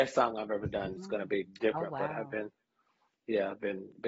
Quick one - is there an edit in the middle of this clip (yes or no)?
yes